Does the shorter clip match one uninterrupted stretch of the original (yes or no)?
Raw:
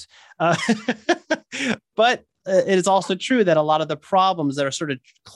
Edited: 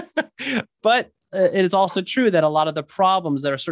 yes